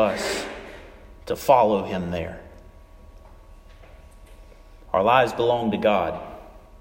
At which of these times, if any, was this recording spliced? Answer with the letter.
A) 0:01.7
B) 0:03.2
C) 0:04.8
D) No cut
C